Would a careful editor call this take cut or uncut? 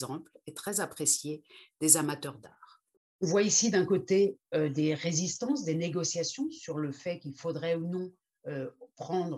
uncut